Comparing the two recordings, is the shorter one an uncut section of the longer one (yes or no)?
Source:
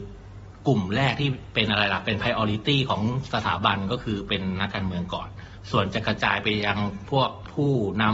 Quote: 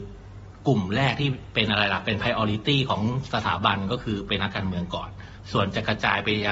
no